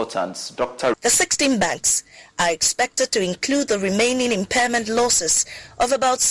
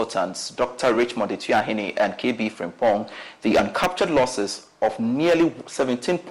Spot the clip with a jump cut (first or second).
first